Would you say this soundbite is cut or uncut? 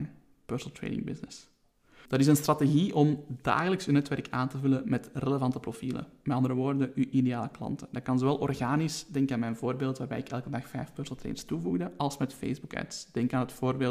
cut